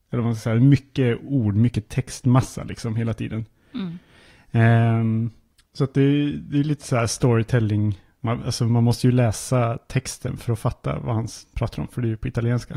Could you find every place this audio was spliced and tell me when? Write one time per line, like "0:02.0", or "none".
none